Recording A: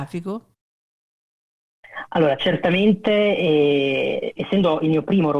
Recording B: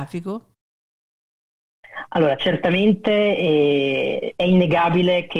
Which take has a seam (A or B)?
A